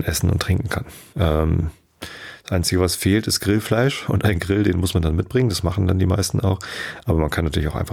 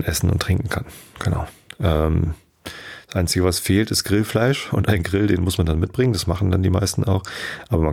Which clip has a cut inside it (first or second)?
first